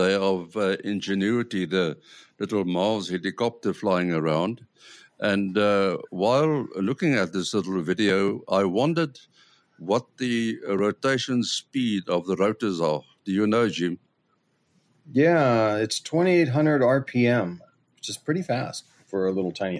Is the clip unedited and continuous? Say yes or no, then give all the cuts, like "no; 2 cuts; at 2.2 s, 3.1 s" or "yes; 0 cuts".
yes; 0 cuts